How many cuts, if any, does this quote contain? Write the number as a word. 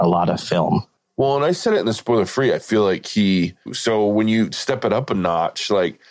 two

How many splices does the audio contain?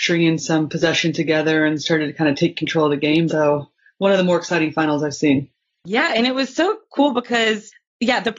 one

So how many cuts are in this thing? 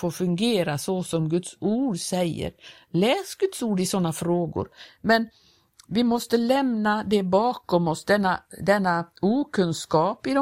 one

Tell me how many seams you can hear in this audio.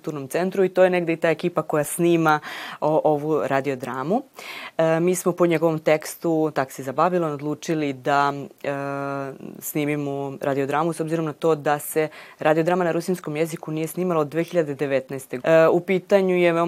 one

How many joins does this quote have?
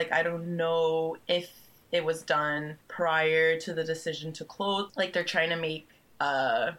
two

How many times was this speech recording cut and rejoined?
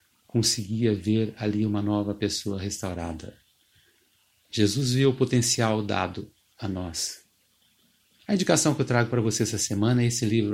one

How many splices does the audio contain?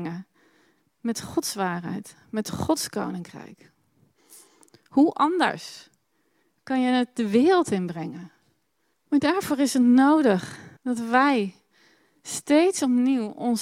two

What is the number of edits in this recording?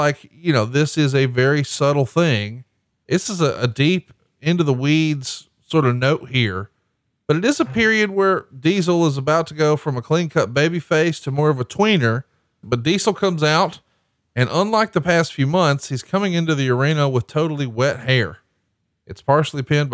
two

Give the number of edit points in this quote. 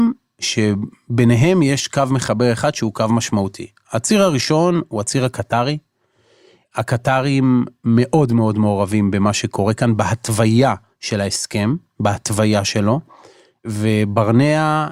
zero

